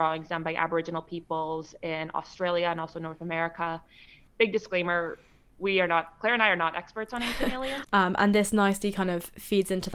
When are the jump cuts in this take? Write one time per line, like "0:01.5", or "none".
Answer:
0:04.3
0:07.8